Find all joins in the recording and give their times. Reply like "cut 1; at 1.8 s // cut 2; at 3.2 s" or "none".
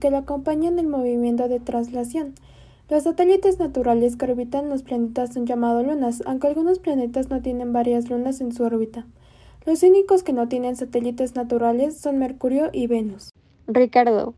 none